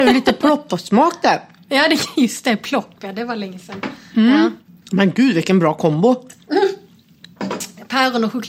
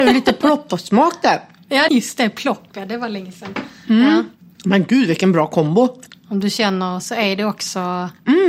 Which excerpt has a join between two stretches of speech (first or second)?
second